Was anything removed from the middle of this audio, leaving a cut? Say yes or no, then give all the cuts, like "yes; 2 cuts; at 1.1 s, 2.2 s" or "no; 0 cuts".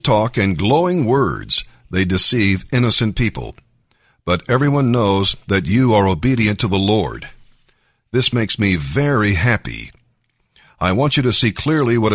no; 0 cuts